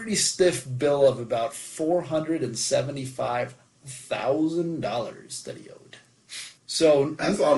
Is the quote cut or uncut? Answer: cut